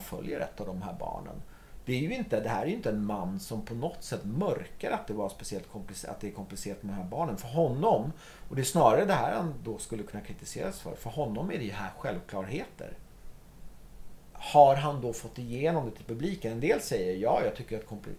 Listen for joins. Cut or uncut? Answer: uncut